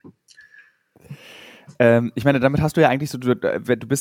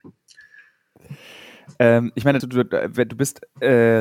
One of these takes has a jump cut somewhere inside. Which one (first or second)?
second